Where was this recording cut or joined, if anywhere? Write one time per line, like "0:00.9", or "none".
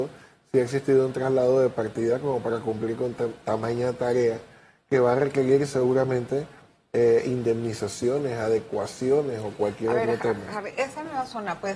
none